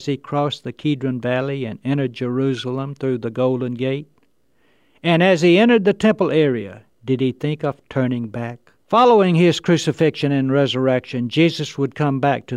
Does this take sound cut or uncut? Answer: cut